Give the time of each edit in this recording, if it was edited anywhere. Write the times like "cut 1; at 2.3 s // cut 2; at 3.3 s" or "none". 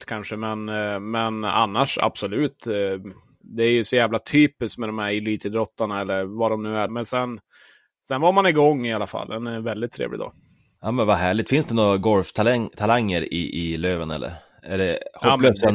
cut 1; at 6.9 s